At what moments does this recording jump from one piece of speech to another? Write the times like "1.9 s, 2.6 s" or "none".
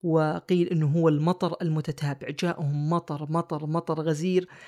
none